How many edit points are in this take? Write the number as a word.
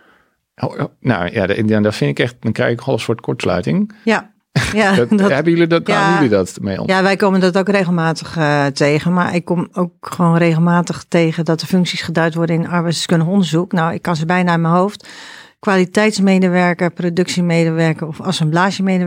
one